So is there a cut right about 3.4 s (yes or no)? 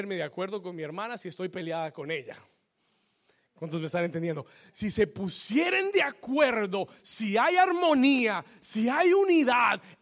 no